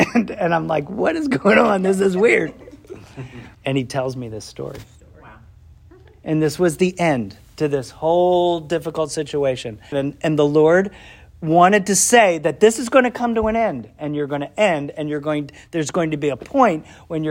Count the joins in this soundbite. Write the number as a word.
two